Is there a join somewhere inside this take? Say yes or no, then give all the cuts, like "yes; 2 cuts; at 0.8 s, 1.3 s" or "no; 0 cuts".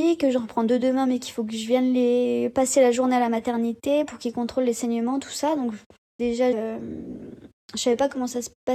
yes; 1 cut; at 6.5 s